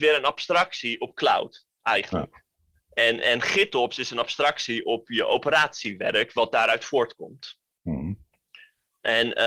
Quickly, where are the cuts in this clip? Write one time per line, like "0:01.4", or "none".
none